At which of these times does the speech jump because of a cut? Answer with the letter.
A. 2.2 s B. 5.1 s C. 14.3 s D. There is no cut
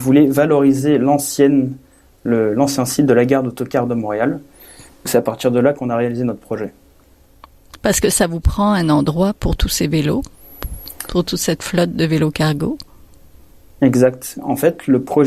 B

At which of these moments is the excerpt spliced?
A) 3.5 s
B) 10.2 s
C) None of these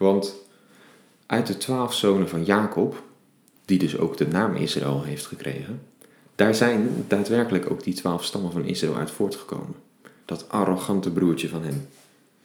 B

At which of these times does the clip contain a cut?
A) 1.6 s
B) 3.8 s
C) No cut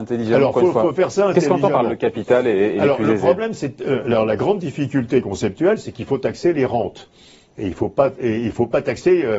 C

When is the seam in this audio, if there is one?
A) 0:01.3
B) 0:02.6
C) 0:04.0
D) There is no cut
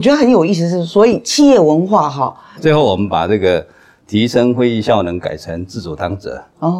B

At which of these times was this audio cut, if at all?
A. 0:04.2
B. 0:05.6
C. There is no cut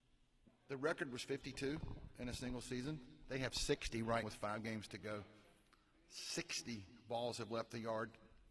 A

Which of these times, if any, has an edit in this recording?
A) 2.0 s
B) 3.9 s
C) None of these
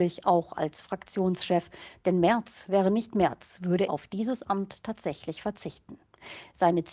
B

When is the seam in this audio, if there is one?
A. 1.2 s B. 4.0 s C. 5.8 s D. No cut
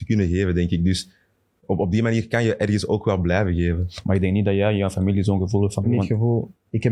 C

